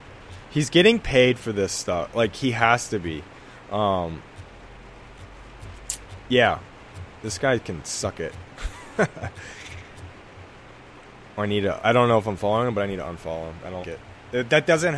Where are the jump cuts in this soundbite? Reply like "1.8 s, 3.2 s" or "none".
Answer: 11.8 s, 13.8 s